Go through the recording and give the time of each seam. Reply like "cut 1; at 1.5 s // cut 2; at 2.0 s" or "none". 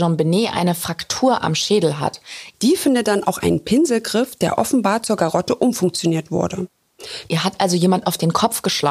cut 1; at 2.5 s // cut 2; at 7.3 s